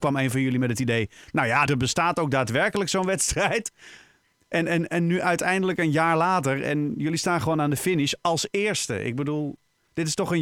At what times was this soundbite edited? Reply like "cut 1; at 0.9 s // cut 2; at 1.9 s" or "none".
cut 1; at 1.7 s